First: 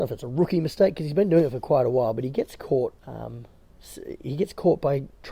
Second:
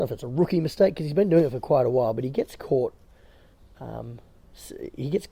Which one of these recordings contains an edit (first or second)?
first